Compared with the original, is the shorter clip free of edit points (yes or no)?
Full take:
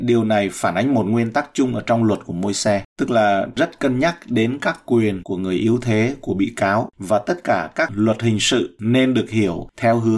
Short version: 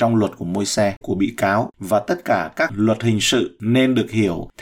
no